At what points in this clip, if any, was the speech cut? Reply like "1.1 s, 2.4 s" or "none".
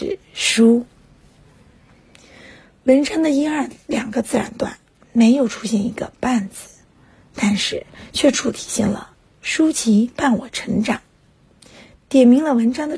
8.3 s